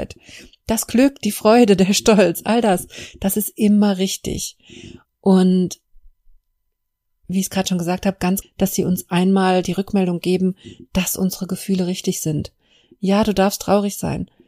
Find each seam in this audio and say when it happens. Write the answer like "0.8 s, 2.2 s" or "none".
5.0 s, 8.4 s